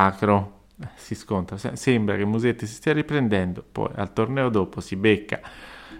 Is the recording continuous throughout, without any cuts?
yes; 0 cuts

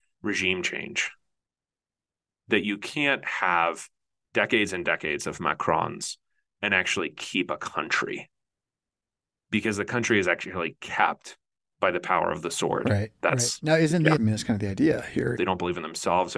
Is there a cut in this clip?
yes; 2 cuts; at 14.2 s, 15.4 s

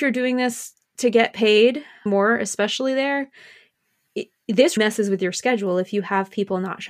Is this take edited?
yes; 2 cuts; at 2.1 s, 4.8 s

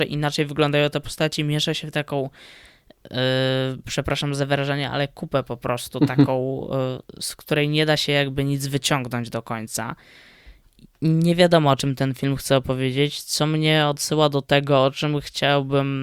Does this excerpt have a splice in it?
no; 0 cuts

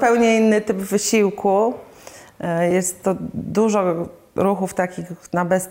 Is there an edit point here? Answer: no; 0 cuts

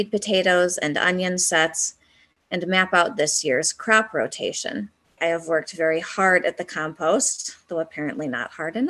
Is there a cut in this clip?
yes; 1 cut; at 5.2 s

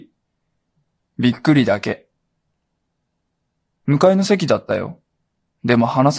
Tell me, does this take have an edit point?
no; 0 cuts

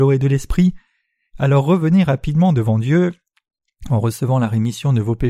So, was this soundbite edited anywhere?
no; 0 cuts

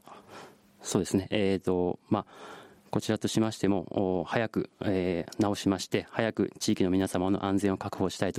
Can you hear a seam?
no; 0 cuts

